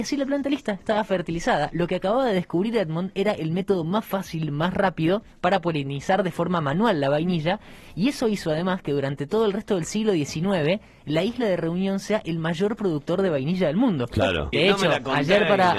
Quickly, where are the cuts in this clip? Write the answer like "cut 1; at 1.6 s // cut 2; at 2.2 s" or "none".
cut 1; at 5.3 s // cut 2; at 14.5 s